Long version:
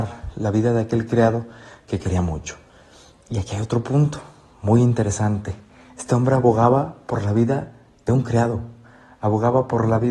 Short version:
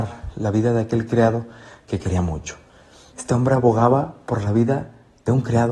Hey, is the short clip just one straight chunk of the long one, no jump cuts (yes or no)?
no